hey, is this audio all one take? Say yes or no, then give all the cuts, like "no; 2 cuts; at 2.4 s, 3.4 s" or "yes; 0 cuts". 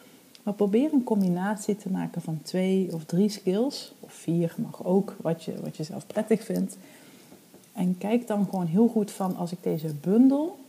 yes; 0 cuts